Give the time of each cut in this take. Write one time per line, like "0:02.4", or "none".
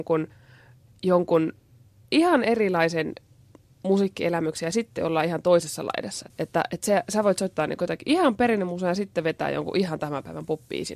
0:06.3